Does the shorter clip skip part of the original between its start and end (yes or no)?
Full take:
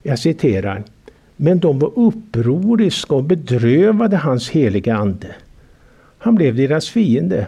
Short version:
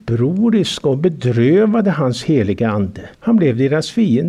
yes